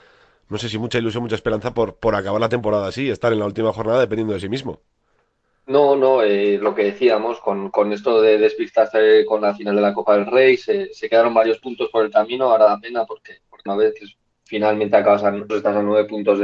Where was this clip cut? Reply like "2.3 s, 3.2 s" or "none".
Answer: 13.7 s, 15.5 s

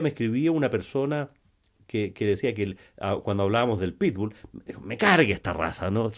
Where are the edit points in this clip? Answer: none

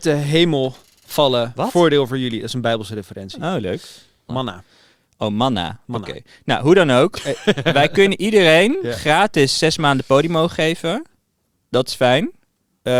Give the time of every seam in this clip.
4.3 s

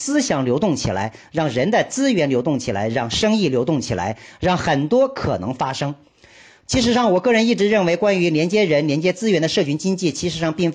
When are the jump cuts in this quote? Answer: none

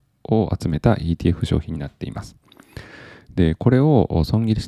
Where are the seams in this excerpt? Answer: none

